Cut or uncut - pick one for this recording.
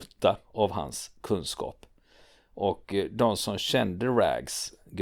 uncut